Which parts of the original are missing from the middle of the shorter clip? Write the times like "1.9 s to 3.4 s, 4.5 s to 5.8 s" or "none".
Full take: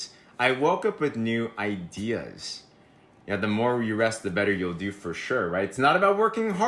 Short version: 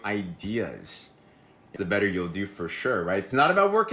3.3 s to 4.2 s